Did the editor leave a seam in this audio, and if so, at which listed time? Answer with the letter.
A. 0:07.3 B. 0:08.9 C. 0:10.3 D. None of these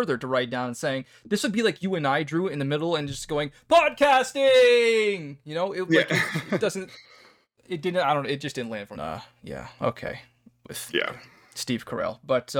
B